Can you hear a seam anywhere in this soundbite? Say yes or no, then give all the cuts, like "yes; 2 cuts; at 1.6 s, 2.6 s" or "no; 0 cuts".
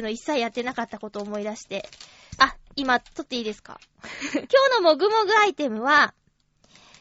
yes; 2 cuts; at 2.4 s, 4.5 s